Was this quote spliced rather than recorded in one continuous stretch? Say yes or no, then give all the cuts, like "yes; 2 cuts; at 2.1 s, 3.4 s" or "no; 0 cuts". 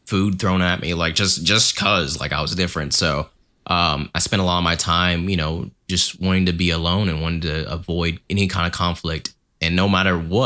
no; 0 cuts